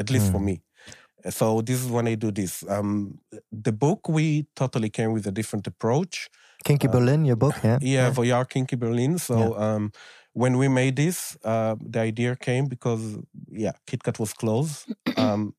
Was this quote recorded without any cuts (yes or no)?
yes